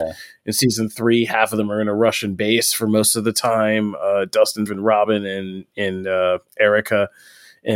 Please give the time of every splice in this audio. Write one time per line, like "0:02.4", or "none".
0:04.7